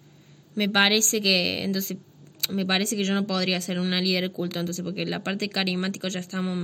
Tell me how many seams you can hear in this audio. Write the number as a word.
zero